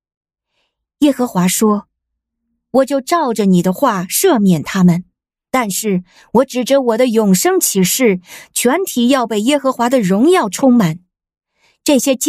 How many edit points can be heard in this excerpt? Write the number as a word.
zero